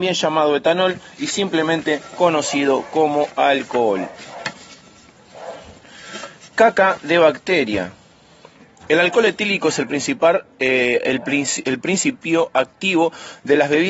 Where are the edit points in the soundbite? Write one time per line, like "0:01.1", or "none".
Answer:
none